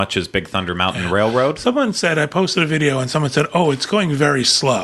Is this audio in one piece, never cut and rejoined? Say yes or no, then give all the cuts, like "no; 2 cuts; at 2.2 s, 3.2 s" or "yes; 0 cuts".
yes; 0 cuts